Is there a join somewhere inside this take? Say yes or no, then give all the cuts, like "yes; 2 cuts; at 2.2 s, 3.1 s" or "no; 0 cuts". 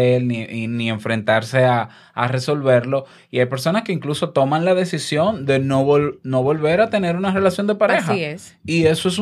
no; 0 cuts